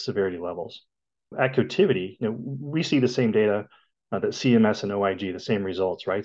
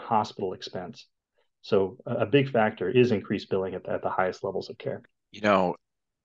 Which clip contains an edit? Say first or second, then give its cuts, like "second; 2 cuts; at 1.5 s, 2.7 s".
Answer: first; 1 cut; at 1.3 s